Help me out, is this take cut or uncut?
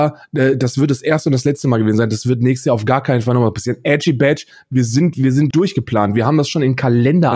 cut